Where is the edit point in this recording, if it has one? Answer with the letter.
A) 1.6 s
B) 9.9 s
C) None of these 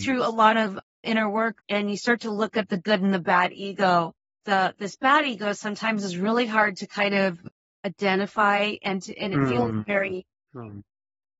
A